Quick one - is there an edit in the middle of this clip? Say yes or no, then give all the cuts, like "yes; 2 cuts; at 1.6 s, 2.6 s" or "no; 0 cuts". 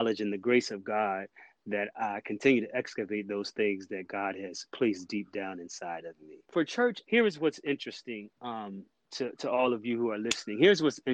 no; 0 cuts